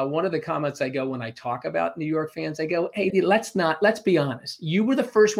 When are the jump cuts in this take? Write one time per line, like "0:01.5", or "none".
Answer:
0:03.1